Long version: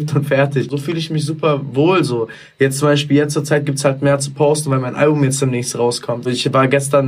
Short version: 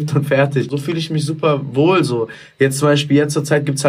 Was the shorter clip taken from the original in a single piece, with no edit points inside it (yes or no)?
yes